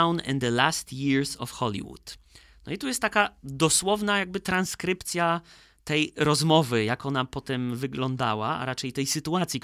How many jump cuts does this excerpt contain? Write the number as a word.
zero